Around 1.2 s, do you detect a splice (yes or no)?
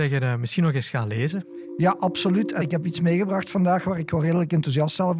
no